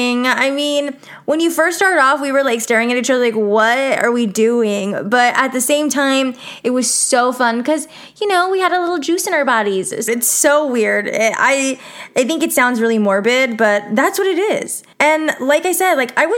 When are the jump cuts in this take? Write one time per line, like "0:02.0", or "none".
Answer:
0:10.1
0:14.9